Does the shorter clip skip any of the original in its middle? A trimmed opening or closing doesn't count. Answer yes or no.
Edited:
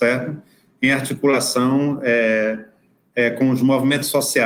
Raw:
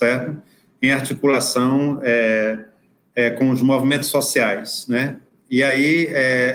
no